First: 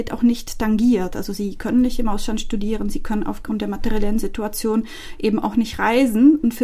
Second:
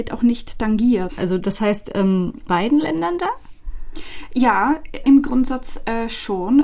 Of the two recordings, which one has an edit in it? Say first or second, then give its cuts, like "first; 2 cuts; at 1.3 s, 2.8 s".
second; 3 cuts; at 1.1 s, 2.5 s, 5.0 s